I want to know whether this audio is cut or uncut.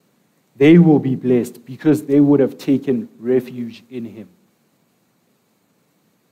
uncut